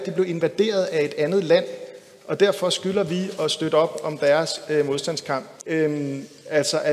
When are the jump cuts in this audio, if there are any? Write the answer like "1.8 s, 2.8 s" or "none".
5.6 s